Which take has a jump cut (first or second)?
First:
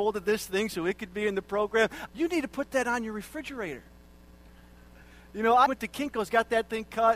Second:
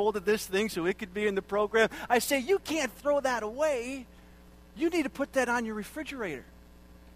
first